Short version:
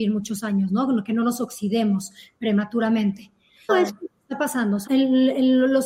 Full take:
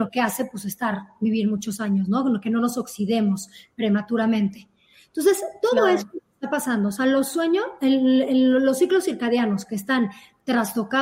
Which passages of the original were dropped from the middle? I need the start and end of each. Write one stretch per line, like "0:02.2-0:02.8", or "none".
0:05.1-0:05.8
0:07.0-0:07.8